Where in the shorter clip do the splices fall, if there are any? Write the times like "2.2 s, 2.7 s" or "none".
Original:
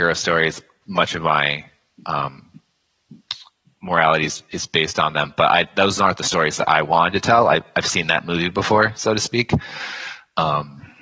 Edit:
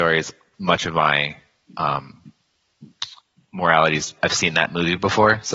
4.2 s